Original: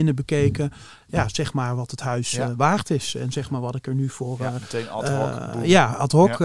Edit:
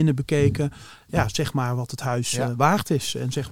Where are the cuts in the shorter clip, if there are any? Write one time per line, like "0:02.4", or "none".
none